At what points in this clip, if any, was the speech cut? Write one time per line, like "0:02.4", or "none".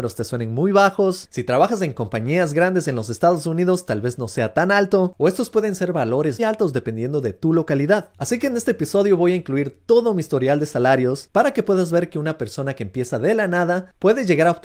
0:06.4

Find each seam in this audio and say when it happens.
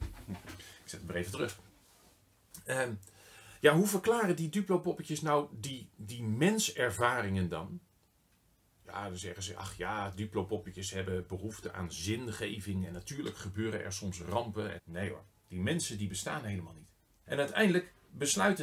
0:14.8
0:17.3

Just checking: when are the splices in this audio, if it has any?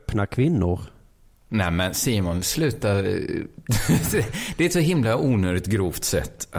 none

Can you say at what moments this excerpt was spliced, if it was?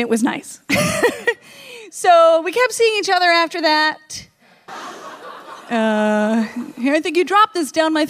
0:04.7

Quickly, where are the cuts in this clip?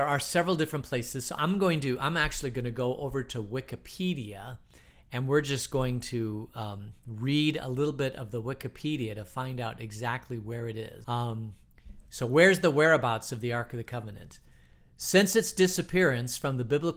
0:11.0

